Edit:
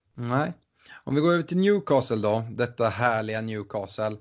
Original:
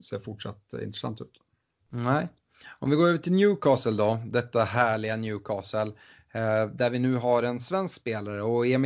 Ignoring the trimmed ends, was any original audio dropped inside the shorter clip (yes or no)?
no